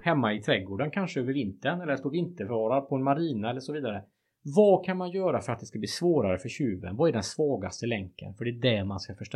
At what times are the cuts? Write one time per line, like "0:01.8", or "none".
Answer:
none